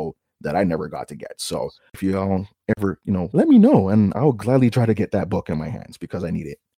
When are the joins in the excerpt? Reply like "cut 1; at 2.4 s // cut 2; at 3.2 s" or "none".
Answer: cut 1; at 3.3 s